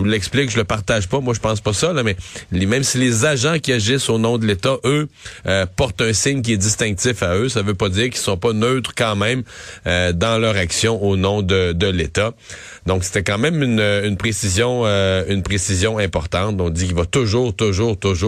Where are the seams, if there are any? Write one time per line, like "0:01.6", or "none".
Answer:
none

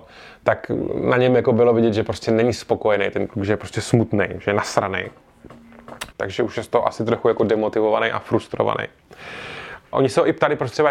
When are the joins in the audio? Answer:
0:06.1
0:09.9

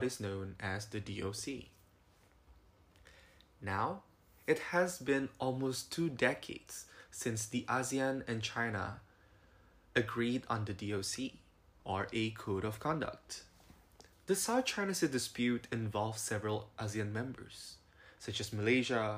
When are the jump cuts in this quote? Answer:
0:11.8
0:14.1

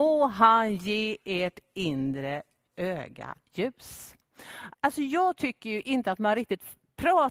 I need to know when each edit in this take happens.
0:04.7

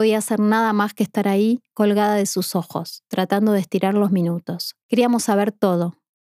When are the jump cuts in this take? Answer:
0:04.8

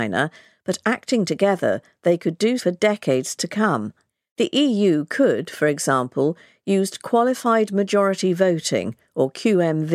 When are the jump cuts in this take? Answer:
0:02.6

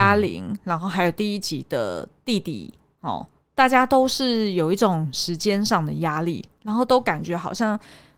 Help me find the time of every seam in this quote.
none

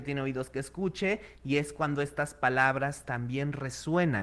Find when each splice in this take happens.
none

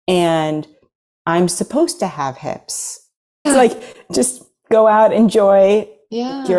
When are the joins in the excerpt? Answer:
0:03.5

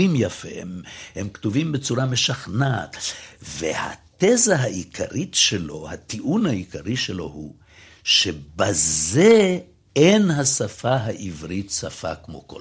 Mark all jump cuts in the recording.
none

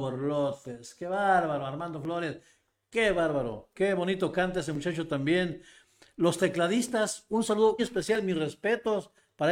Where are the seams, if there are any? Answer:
0:07.8

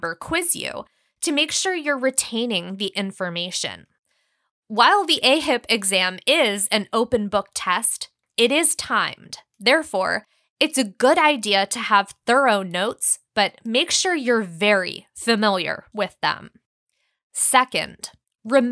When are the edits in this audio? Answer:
none

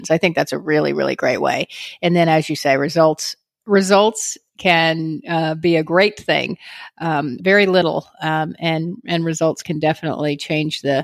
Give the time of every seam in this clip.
0:07.4

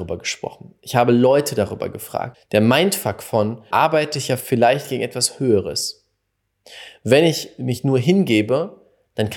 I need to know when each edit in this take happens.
0:02.3
0:03.7

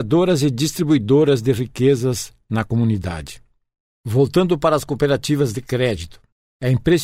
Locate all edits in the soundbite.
none

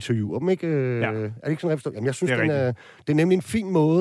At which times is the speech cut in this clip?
none

